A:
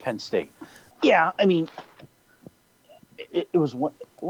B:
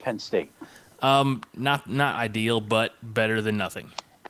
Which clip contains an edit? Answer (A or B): A